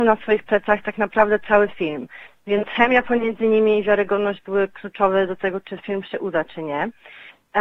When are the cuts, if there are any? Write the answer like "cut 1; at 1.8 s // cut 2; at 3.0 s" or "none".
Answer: none